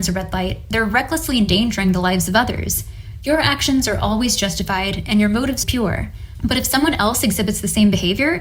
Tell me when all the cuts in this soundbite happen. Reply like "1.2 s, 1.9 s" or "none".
5.6 s